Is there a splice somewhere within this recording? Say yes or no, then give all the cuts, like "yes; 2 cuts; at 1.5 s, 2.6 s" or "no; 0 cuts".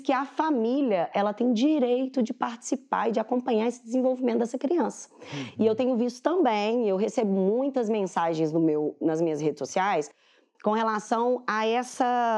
no; 0 cuts